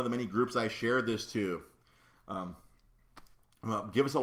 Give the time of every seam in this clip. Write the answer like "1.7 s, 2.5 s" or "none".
none